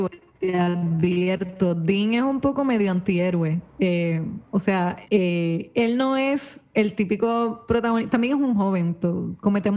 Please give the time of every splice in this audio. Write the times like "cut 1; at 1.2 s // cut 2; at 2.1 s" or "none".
cut 1; at 5.0 s